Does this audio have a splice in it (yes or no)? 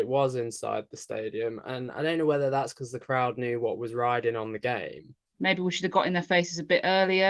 yes